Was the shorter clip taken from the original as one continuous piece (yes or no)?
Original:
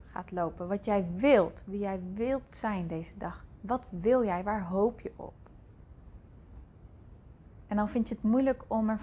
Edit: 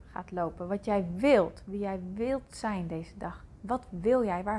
yes